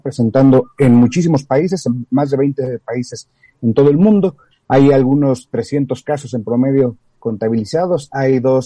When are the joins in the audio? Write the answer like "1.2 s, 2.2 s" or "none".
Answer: 4.5 s, 7.2 s